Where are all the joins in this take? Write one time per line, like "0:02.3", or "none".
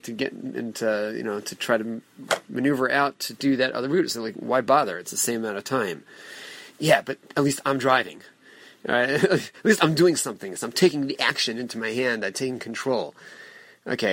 none